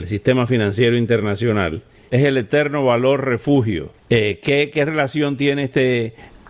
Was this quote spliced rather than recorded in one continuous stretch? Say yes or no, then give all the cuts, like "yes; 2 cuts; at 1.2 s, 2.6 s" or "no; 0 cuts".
yes; 1 cut; at 2.1 s